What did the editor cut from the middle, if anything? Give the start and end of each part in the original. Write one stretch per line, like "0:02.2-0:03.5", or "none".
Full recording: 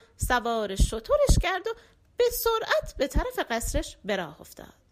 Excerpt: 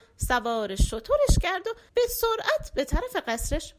0:01.9-0:02.1